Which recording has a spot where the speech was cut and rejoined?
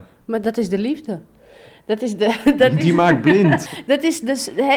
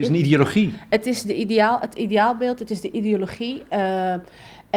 first; 1 cut; at 3.7 s

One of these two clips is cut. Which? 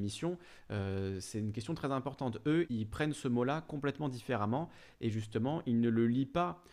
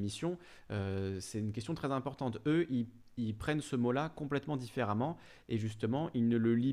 first; 1 cut; at 2.7 s

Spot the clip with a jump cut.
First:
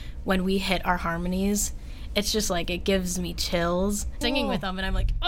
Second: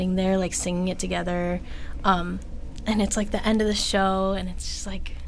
first; 1 cut; at 4.2 s

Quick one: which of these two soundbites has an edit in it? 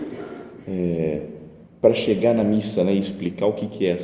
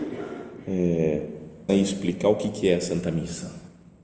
second; 1 cut; at 1.7 s

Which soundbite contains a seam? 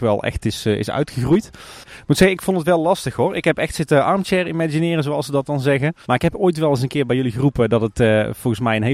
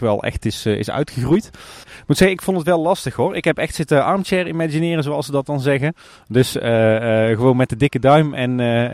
first; 1 cut; at 6.0 s

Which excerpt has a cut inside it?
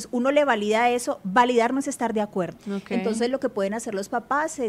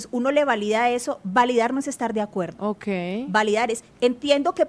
first; 1 cut; at 2.6 s

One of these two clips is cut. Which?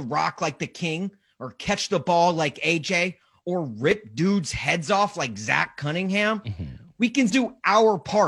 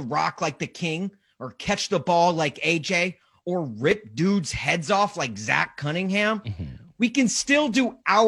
first; 1 cut; at 7.3 s

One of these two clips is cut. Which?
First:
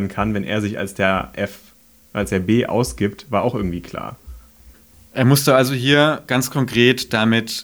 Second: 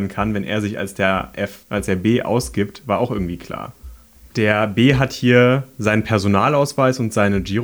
second; 2 cuts; at 1.6 s, 4.3 s

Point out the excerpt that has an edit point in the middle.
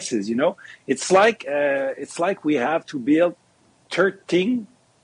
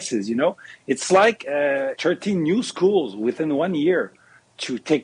second; 1 cut; at 1.9 s

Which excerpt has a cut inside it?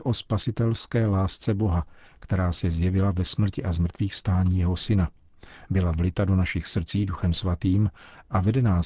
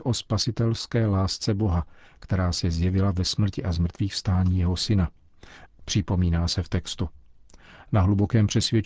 second; 1 cut; at 5.7 s

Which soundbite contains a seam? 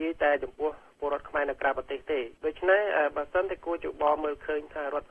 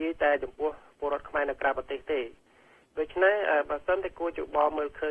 first; 1 cut; at 2.4 s

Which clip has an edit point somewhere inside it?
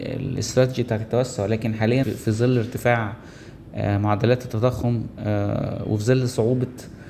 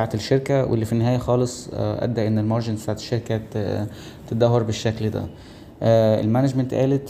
first; 1 cut; at 2.0 s

